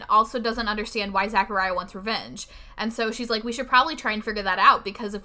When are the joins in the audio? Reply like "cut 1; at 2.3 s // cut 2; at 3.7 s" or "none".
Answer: none

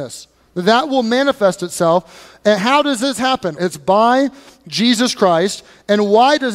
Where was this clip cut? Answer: cut 1; at 3.6 s

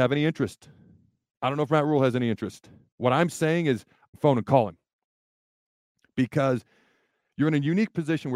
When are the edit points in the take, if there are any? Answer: cut 1; at 4.1 s

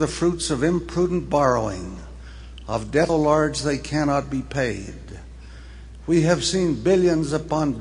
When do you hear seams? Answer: cut 1; at 3.1 s

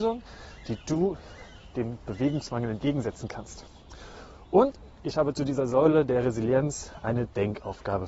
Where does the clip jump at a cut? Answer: none

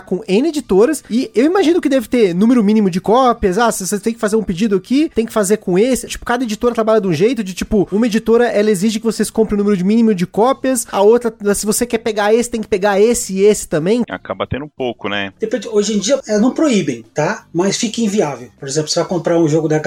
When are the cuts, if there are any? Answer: cut 1; at 6.1 s // cut 2; at 14.0 s // cut 3; at 16.2 s

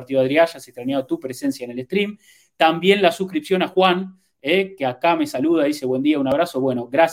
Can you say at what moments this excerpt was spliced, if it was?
none

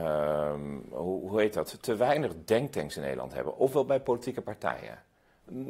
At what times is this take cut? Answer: none

